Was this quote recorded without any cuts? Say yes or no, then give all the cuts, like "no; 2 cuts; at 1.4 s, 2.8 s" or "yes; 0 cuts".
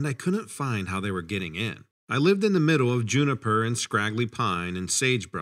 yes; 0 cuts